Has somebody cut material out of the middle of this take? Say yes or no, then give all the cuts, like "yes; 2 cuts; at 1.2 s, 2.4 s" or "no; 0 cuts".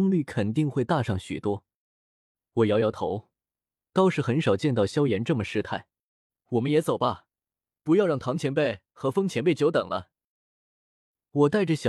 no; 0 cuts